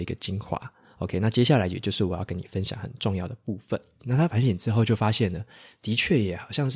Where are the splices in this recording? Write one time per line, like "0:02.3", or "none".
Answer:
0:04.0